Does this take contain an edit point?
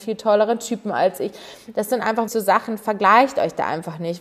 yes; 1 cut; at 2.3 s

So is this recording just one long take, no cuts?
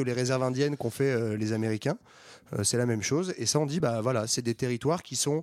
yes; 0 cuts

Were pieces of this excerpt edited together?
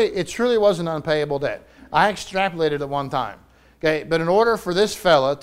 no; 0 cuts

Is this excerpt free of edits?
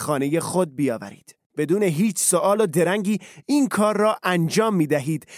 no; 1 cut; at 1.5 s

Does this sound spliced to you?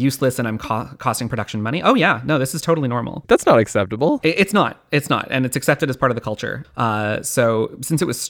yes; 2 cuts; at 3.2 s, 6.6 s

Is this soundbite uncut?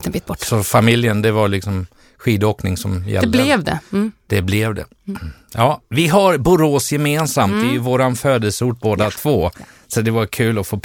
yes; 0 cuts

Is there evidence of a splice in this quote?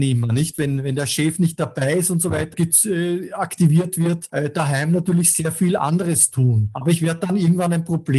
yes; 1 cut; at 2.5 s

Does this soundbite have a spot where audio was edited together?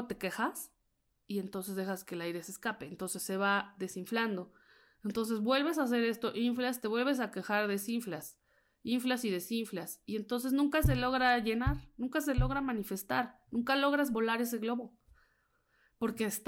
no; 0 cuts

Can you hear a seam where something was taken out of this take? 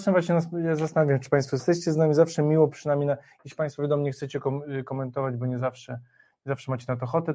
no; 0 cuts

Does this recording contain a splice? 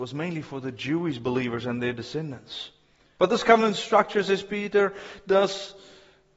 yes; 1 cut; at 3.2 s

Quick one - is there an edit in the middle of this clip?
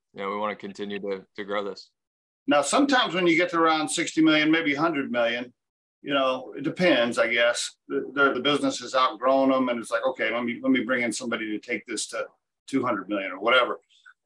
yes; 1 cut; at 8.3 s

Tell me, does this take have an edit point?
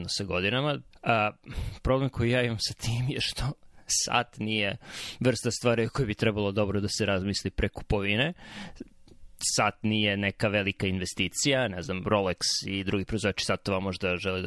yes; 1 cut; at 0.9 s

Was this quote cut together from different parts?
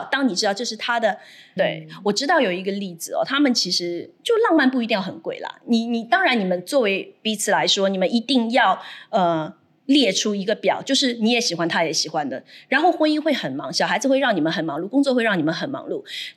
yes; 1 cut; at 1.6 s

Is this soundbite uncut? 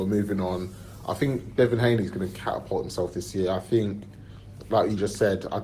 yes; 0 cuts

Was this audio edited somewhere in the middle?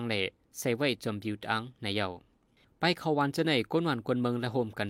no; 0 cuts

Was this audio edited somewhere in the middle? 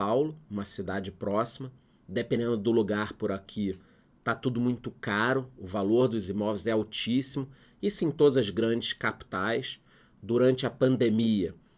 no; 0 cuts

